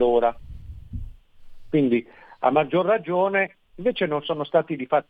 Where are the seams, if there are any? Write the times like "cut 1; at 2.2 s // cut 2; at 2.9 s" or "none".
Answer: cut 1; at 3.6 s

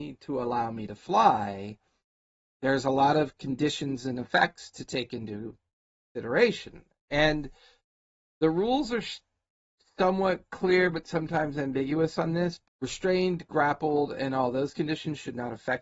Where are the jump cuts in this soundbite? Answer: cut 1; at 12.6 s

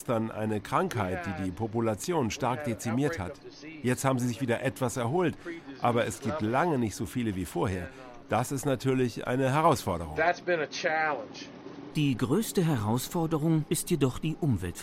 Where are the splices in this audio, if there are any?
cut 1; at 13.7 s

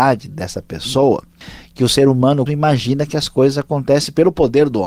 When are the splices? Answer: cut 1; at 2.5 s

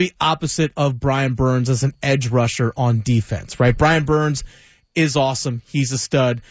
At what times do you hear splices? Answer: none

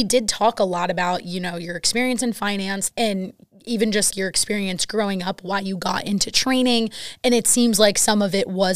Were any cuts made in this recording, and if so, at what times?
cut 1; at 2.9 s // cut 2; at 4.1 s

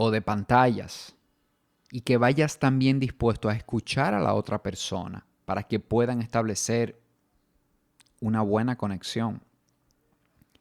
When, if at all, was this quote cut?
none

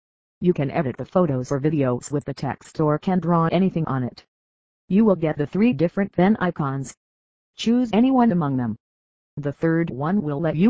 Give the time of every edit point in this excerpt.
none

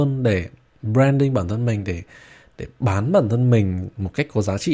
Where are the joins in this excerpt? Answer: none

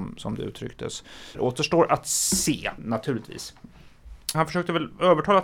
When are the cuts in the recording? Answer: cut 1; at 1.3 s // cut 2; at 2.8 s // cut 3; at 4.3 s

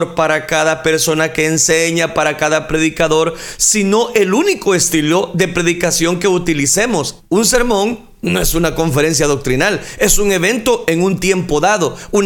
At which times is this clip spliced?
cut 1; at 7.2 s

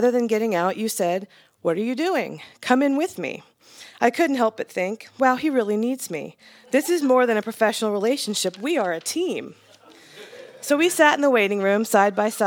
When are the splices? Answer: none

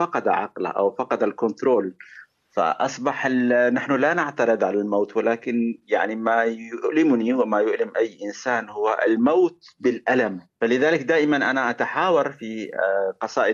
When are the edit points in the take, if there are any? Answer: cut 1; at 10.5 s

